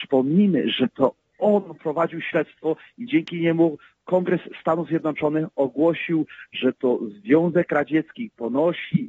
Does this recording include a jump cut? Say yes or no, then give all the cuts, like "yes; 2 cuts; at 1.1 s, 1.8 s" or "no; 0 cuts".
no; 0 cuts